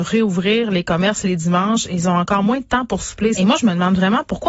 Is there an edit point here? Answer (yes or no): yes